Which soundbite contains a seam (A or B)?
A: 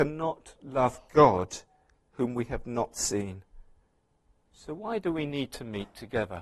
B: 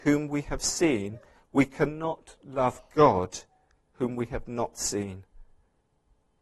A